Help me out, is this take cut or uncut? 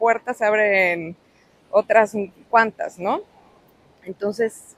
uncut